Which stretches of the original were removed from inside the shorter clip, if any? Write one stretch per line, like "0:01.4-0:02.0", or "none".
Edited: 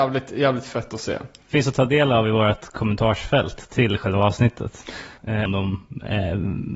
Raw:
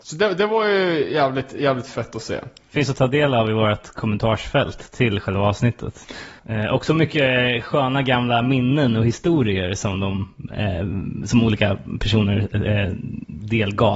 0:06.7-0:09.9